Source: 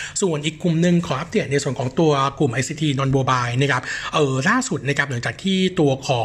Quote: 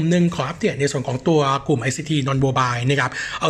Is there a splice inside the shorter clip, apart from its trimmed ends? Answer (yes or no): no